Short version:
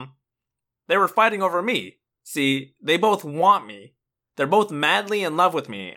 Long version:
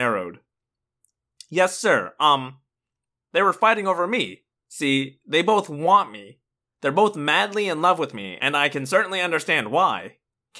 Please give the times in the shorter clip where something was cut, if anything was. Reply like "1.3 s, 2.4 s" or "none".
none